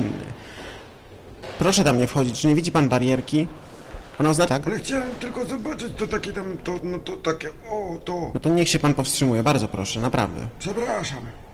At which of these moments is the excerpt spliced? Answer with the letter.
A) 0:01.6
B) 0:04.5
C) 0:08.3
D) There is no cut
B